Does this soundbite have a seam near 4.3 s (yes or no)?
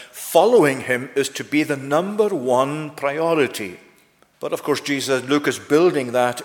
yes